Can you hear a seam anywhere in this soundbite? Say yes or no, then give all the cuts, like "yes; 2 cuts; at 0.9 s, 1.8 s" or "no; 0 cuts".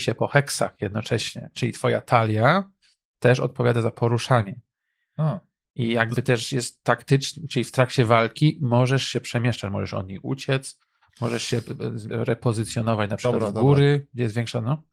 yes; 1 cut; at 12.1 s